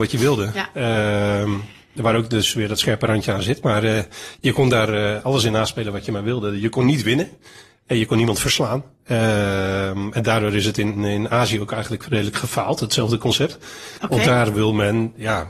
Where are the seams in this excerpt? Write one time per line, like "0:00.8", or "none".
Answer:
none